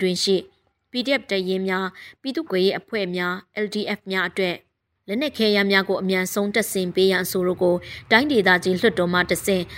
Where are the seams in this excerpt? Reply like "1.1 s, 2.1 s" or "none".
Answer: 2.5 s